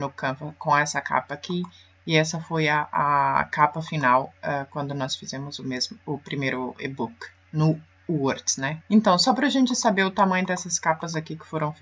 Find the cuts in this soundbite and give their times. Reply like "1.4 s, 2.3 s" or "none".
8.8 s